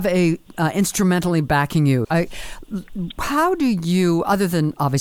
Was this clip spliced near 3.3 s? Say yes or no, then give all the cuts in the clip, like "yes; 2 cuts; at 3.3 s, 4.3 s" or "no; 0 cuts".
no; 1 cut; at 2.0 s